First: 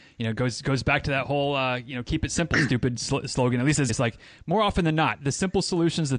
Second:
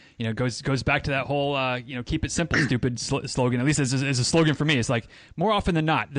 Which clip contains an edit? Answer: first; 1 cut; at 3.9 s

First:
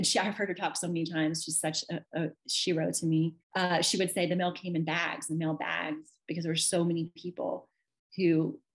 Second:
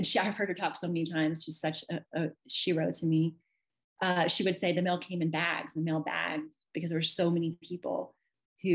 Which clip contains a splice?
first; 1 cut; at 3.4 s

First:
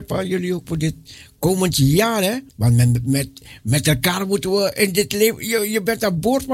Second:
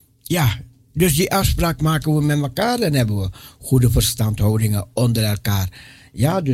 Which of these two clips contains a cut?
first; 1 cut; at 2.5 s

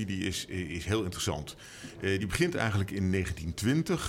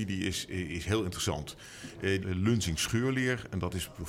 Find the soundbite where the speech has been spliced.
second; 1 cut; at 2.2 s

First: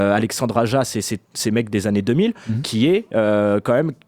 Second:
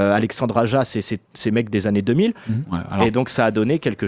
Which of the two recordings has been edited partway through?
second; 1 cut; at 2.6 s

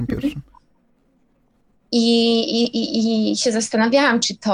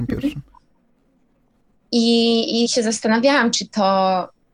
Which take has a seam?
second; 1 cut; at 2.7 s

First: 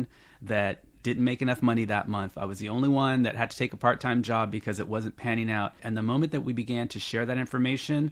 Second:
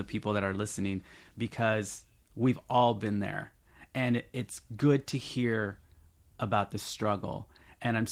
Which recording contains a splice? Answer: first; 1 cut; at 5.8 s

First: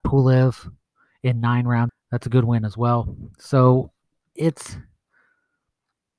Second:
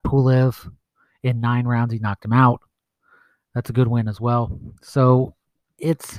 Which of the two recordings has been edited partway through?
first; 1 cut; at 1.9 s

